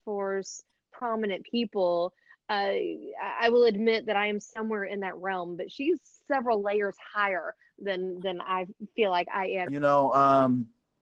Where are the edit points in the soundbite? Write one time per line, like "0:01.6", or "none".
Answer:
0:09.7